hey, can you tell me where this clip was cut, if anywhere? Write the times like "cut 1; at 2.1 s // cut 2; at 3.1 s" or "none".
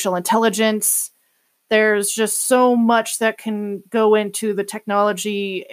none